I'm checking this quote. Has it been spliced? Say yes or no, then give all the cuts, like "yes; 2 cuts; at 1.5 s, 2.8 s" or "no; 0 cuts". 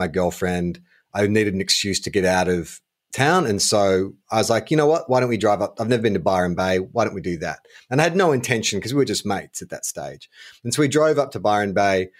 no; 0 cuts